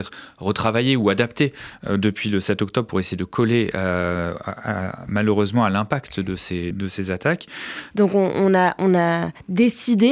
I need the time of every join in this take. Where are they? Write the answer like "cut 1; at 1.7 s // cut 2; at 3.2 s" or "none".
cut 1; at 6.7 s // cut 2; at 7.9 s